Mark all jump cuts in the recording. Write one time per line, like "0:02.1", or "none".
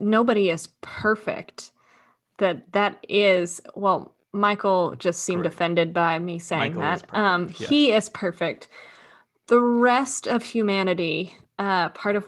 none